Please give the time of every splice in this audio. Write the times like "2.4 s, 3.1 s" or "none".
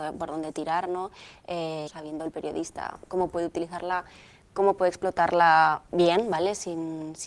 1.9 s

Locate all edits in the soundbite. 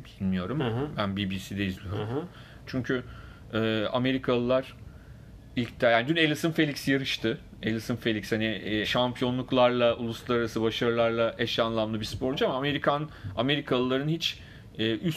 2.7 s, 8.8 s

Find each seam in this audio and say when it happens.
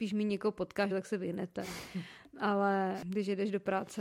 0.9 s

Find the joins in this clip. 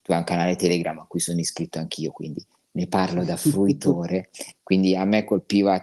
4.5 s

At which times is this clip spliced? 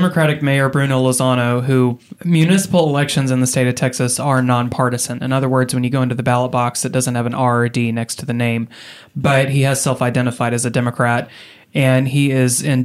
2.2 s

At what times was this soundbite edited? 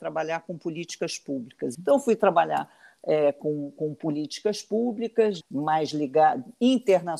1.7 s, 5.4 s

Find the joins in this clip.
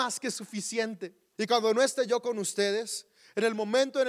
1.4 s

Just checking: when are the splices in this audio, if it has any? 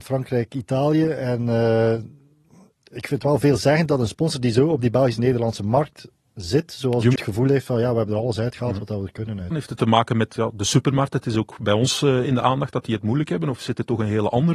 7.2 s, 9.5 s

